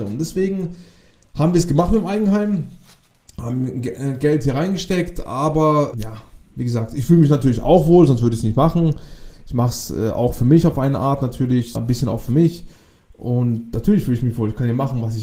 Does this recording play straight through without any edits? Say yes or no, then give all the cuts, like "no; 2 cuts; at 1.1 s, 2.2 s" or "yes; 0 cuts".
no; 2 cuts; at 5.9 s, 11.7 s